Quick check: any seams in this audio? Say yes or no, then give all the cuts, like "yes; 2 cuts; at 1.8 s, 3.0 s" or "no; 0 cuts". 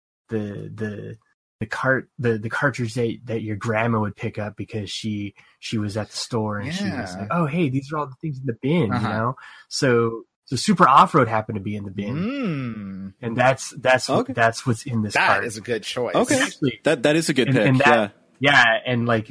no; 0 cuts